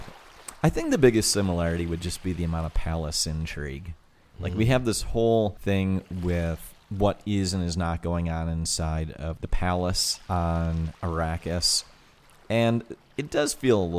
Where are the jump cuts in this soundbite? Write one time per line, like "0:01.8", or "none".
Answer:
none